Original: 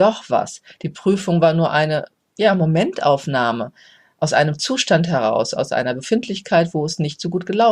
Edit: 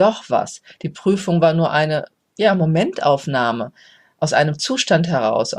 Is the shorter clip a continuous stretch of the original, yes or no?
yes